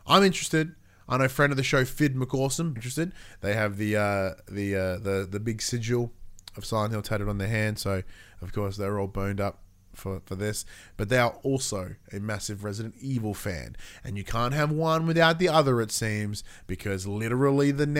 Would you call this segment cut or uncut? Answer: cut